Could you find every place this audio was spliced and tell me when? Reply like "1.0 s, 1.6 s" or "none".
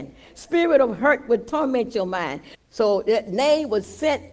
2.5 s